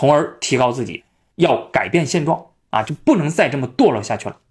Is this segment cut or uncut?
cut